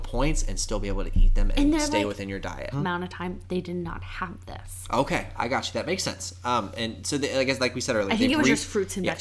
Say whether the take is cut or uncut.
cut